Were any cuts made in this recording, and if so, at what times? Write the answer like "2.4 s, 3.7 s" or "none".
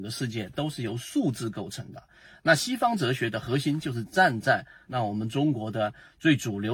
4.9 s